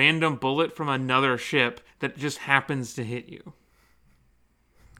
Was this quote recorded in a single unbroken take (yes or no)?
yes